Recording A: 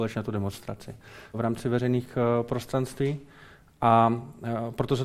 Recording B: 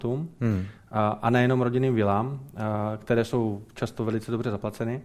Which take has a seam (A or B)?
A